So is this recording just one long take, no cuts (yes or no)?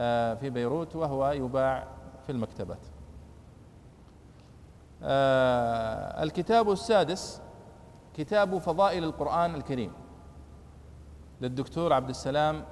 no